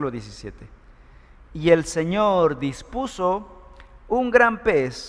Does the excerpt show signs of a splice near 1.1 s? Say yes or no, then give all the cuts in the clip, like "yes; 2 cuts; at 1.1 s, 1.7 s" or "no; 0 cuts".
no; 0 cuts